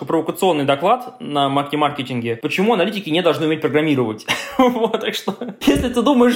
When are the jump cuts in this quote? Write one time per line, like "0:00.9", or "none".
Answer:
none